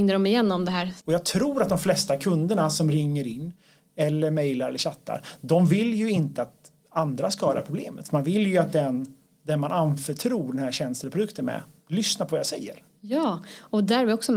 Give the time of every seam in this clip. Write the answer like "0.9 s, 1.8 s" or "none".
1.0 s